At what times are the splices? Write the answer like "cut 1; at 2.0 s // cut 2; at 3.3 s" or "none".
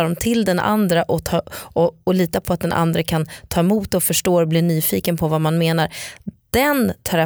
none